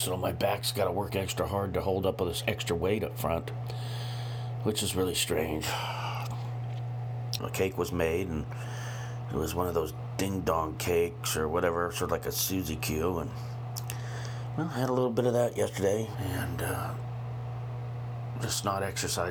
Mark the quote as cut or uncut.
cut